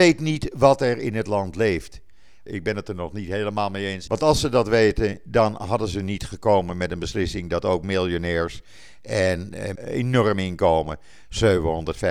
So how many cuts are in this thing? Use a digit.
3